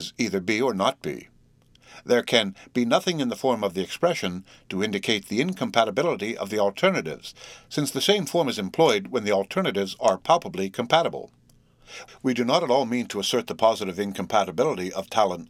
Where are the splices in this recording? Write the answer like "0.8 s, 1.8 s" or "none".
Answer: 12.1 s